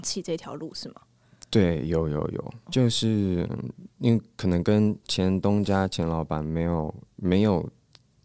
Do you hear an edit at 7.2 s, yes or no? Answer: no